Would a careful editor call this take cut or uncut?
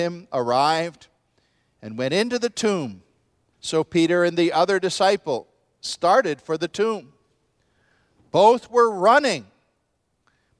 cut